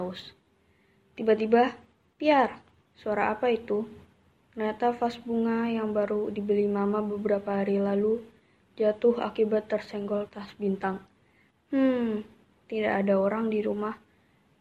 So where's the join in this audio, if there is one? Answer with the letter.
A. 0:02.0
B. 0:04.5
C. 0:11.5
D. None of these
C